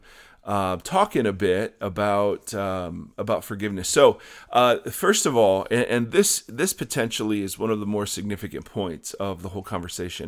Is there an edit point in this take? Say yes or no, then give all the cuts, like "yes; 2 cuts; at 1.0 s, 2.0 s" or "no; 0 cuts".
no; 0 cuts